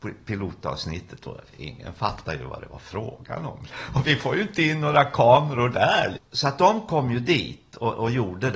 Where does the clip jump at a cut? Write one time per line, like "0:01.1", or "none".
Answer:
0:03.7
0:06.2